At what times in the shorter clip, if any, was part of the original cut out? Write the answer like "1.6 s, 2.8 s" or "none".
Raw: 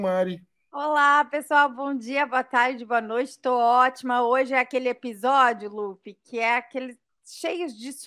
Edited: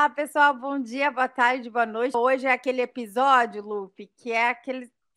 2.1 s

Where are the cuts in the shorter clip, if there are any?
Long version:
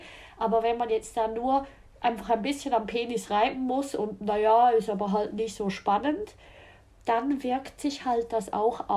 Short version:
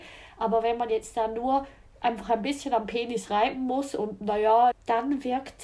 4.7 s

